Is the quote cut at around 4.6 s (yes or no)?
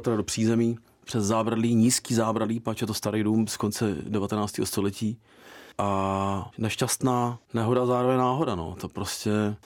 no